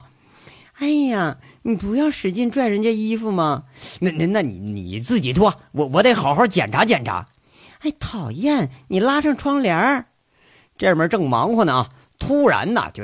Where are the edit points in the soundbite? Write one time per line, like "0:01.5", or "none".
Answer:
none